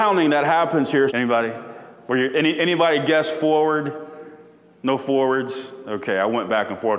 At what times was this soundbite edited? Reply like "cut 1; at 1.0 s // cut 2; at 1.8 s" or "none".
cut 1; at 1.1 s

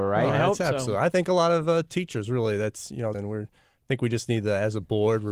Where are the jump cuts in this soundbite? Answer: cut 1; at 3.1 s

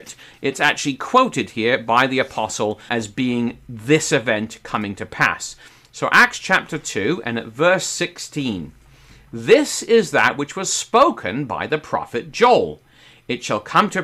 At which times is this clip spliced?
cut 1; at 2.9 s

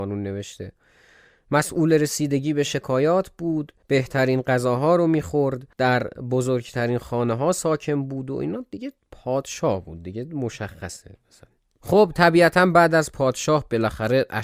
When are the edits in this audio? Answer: cut 1; at 3.8 s // cut 2; at 5.7 s

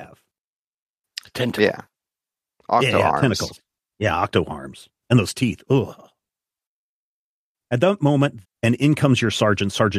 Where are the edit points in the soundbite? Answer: cut 1; at 5.0 s // cut 2; at 8.4 s

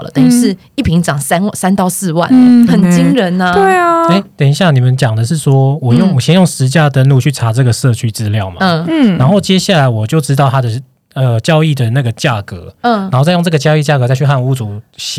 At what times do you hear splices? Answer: cut 1; at 2.7 s

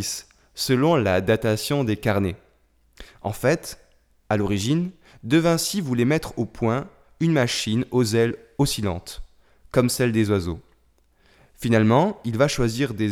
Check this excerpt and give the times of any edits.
none

